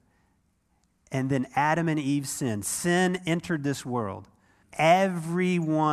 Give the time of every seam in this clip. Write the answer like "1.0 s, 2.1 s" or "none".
4.6 s